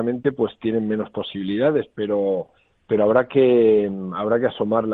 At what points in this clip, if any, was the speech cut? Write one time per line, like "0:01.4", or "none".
none